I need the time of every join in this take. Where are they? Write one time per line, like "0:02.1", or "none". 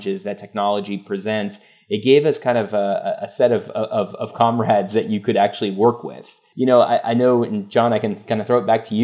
0:06.5